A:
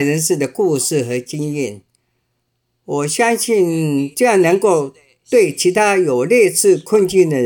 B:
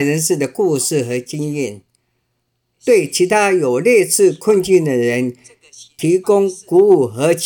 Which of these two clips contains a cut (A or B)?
B